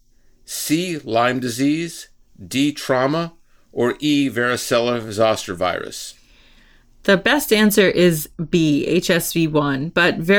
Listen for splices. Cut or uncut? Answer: uncut